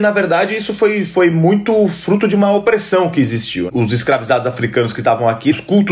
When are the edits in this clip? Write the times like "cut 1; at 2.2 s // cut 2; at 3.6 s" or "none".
none